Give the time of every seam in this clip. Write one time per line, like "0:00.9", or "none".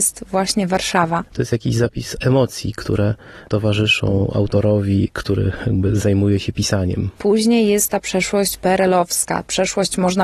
0:01.3
0:07.2